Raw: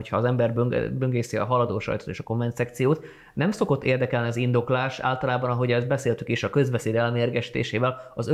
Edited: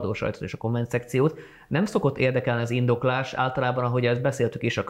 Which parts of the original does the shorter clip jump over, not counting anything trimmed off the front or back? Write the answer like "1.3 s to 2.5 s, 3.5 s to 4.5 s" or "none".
none